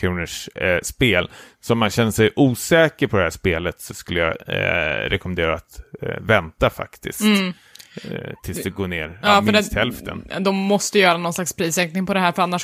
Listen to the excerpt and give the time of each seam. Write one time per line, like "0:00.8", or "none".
none